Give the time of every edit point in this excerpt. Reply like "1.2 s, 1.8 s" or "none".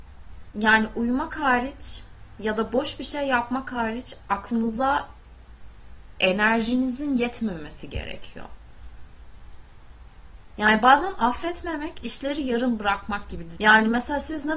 13.6 s